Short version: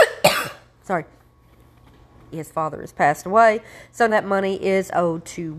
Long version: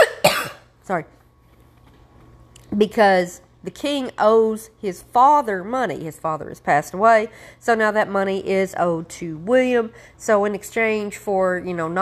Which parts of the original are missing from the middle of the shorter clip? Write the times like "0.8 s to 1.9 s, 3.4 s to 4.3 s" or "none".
2.3 s to 6.0 s, 7.8 s to 7.9 s